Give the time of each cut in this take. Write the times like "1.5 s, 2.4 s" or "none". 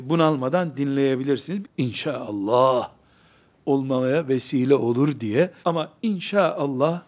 1.6 s, 5.6 s